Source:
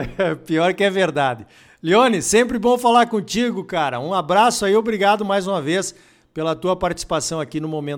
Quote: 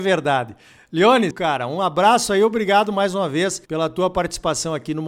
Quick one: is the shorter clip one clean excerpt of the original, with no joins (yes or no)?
no